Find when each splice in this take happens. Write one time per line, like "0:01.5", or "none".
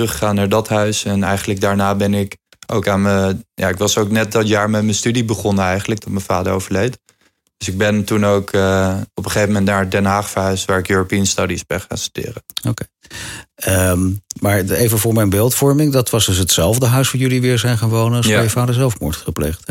none